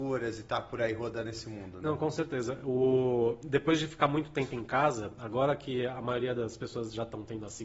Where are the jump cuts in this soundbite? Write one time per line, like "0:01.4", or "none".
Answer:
none